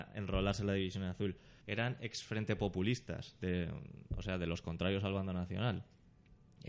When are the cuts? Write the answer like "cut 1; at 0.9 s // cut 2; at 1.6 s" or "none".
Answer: cut 1; at 1.6 s